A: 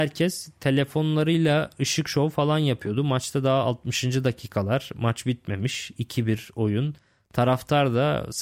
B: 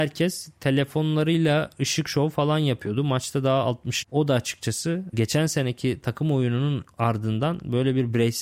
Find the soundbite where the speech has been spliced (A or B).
B